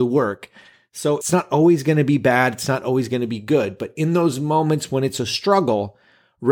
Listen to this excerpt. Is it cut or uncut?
cut